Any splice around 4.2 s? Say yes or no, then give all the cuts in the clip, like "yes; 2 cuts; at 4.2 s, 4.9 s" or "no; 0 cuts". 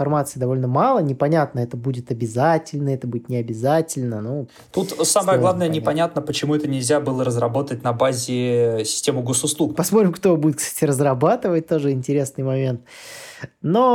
no; 1 cut; at 9.7 s